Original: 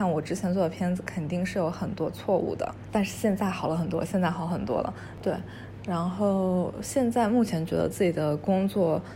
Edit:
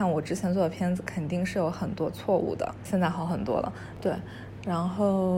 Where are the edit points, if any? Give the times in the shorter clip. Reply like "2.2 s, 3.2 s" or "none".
2.9 s